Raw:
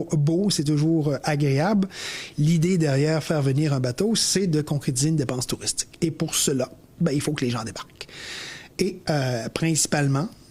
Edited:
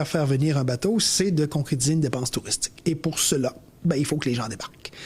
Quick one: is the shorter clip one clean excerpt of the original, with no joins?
yes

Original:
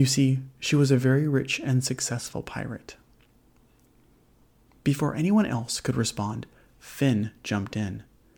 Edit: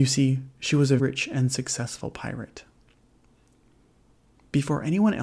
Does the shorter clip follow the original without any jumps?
no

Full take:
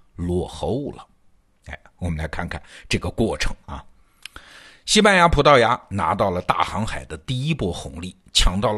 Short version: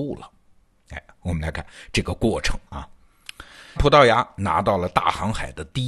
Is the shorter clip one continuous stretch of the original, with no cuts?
no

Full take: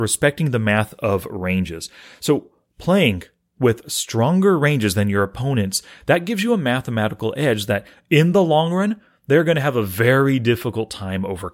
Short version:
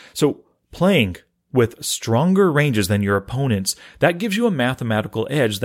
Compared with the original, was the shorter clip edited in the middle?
no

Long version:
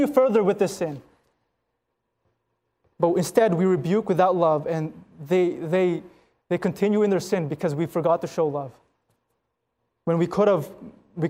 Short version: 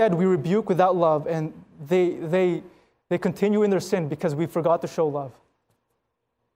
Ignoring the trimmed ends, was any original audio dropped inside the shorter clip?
no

